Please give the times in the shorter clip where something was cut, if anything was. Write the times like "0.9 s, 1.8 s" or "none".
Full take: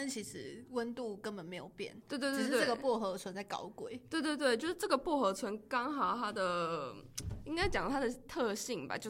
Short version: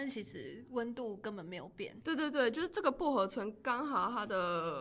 2.0 s

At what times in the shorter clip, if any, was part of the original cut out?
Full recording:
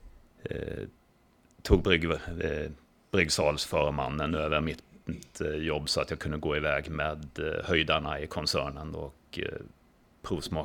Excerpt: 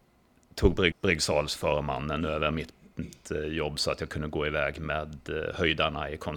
0.9 s

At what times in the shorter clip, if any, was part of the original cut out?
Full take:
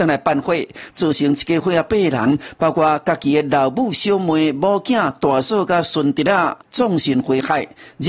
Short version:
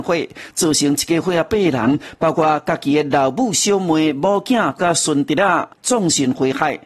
4.8 s

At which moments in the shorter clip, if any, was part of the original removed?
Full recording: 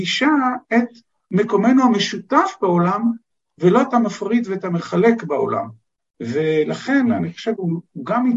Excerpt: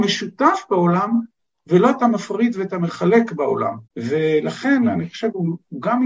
3.9 s

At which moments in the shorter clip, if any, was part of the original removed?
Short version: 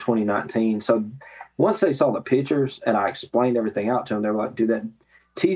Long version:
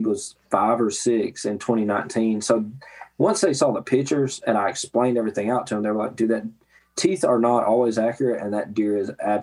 none

